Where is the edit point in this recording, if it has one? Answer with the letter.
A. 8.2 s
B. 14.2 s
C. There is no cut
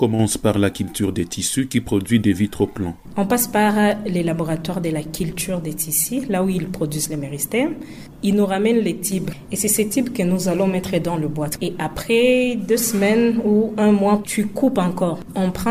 B